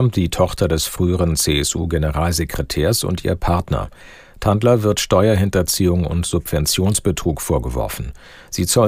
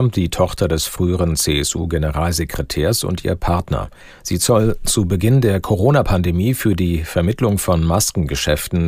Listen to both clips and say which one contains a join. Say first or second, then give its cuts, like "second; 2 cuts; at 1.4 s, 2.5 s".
second; 1 cut; at 4.1 s